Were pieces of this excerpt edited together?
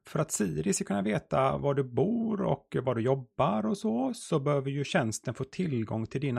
no; 0 cuts

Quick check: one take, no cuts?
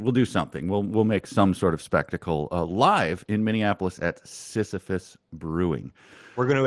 yes; 0 cuts

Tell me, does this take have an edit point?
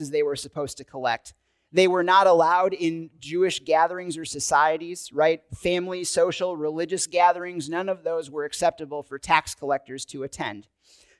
no; 0 cuts

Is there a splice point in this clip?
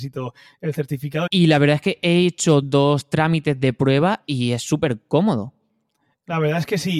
yes; 2 cuts; at 1.3 s, 2.6 s

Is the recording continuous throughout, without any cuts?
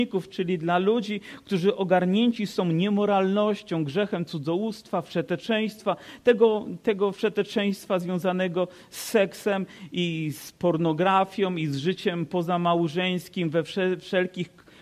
yes; 0 cuts

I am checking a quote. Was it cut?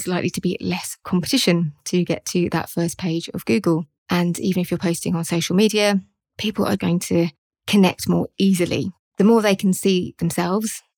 yes; 1 cut; at 6.8 s

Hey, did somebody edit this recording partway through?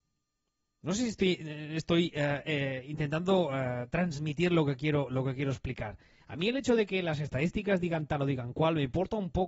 no; 0 cuts

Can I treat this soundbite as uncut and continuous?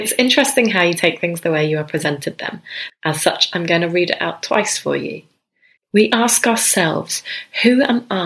no; 2 cuts; at 2.9 s, 5.8 s

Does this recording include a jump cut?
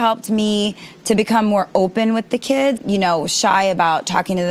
yes; 1 cut; at 2.8 s

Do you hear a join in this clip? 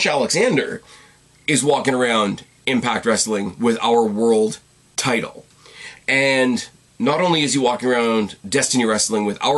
no; 0 cuts

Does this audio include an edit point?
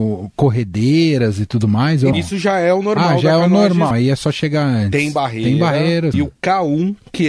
yes; 3 cuts; at 2.1 s, 3.9 s, 6.1 s

